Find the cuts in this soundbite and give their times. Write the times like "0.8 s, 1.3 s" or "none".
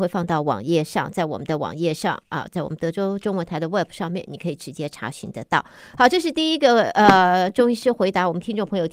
none